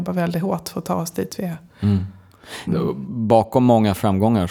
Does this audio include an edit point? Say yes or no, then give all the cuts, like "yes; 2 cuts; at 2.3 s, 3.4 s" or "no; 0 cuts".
yes; 1 cut; at 2.7 s